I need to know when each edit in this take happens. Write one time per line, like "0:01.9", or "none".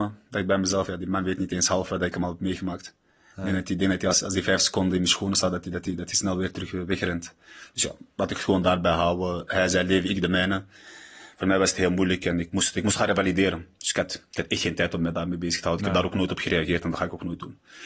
none